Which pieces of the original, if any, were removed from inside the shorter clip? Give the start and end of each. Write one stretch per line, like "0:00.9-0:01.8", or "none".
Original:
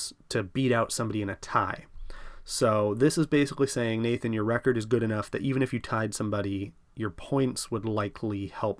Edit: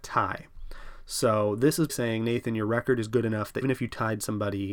0:03.3-0:03.7
0:05.4-0:05.5